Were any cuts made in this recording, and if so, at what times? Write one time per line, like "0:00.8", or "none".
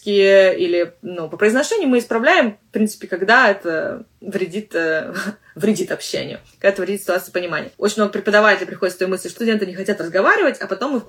0:09.4